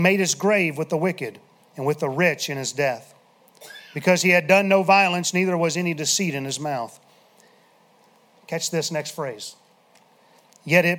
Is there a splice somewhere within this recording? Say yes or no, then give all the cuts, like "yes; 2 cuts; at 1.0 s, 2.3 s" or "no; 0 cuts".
no; 0 cuts